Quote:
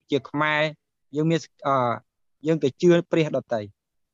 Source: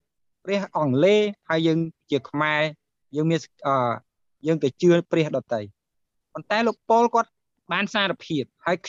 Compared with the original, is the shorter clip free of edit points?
yes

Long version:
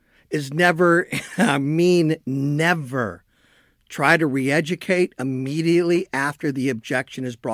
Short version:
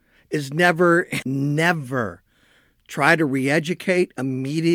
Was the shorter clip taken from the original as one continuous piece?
no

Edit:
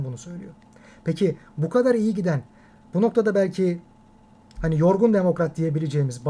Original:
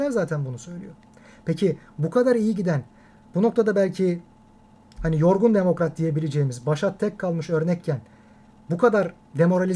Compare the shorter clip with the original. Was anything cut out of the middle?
no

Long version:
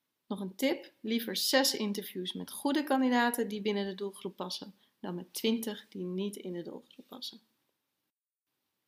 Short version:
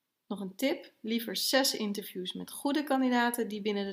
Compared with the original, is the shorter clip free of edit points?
yes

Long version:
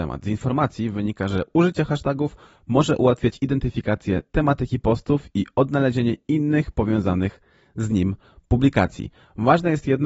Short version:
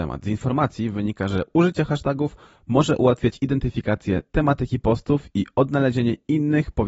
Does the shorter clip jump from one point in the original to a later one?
no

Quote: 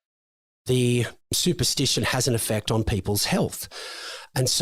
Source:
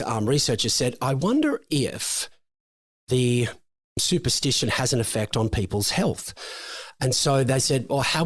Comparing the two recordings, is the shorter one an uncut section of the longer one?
no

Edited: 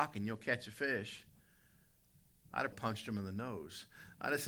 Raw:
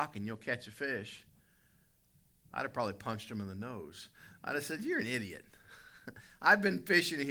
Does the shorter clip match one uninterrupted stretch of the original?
no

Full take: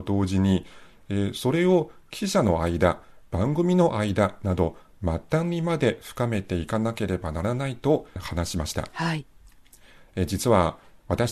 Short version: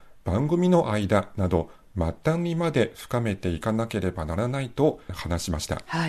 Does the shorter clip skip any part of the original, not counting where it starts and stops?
no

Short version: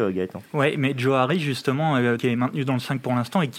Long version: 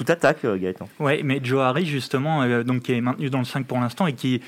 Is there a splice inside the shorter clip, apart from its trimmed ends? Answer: yes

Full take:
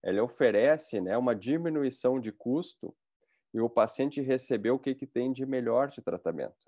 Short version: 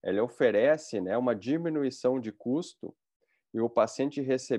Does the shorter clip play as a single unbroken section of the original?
yes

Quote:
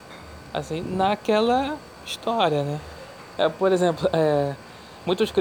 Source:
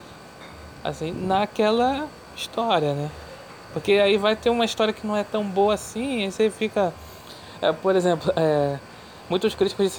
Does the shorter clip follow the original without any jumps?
no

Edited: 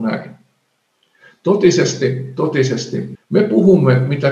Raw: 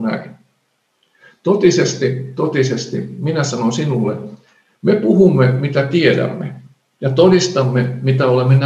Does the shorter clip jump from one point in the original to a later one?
yes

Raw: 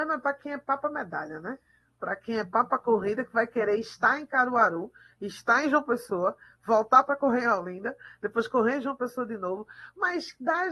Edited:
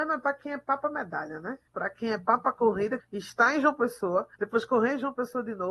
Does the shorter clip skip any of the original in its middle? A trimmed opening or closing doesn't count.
yes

